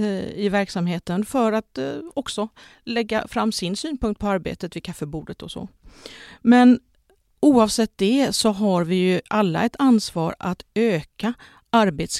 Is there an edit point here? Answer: no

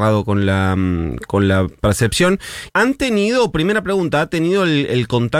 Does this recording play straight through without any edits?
no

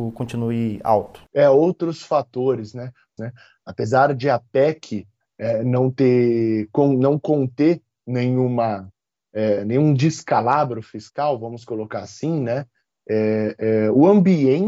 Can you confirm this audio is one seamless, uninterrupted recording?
no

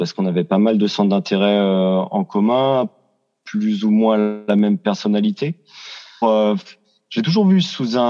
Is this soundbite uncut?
no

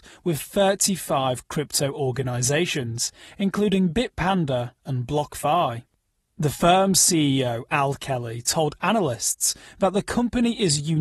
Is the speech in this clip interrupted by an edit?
yes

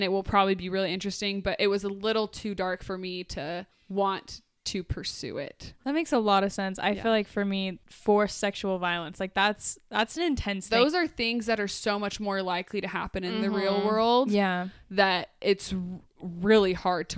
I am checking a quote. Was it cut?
no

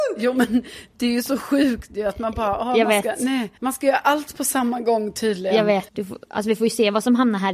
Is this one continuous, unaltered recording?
no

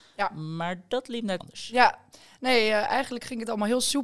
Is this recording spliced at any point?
yes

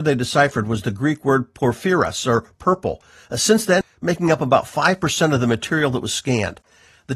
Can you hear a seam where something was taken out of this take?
yes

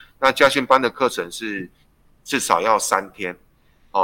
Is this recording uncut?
yes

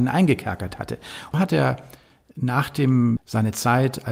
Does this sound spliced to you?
yes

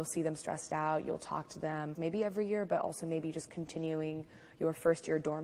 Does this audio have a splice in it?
yes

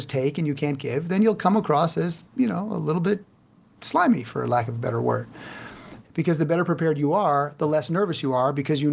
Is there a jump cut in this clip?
yes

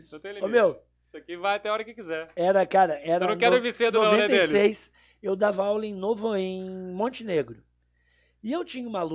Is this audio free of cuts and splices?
yes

